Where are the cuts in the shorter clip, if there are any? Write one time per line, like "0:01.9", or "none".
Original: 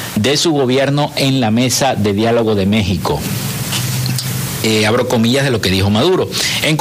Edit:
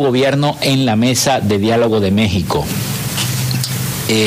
none